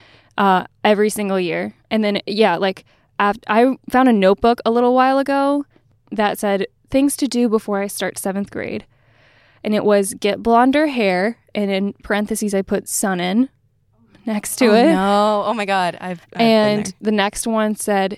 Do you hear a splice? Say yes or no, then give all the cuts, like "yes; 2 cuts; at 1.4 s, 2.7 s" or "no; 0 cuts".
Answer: no; 0 cuts